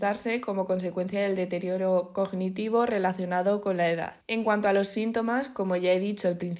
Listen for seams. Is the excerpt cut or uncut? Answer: cut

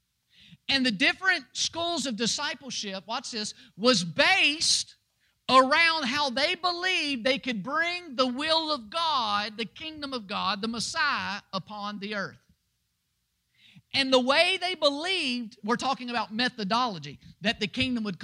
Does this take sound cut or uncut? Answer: uncut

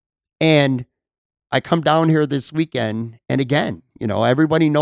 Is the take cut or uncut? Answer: uncut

